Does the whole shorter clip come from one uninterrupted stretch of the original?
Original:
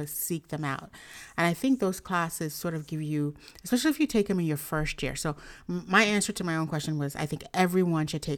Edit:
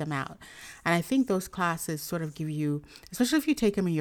yes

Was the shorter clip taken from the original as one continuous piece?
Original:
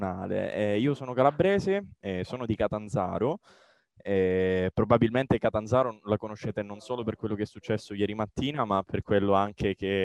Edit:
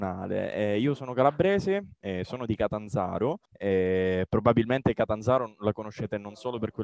no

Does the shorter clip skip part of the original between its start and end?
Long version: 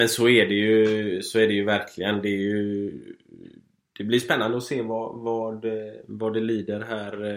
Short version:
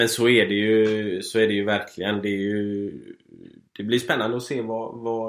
yes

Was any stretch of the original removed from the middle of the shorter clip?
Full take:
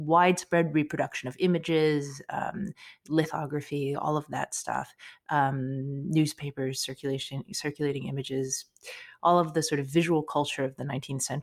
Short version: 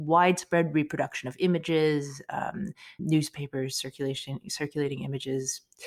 yes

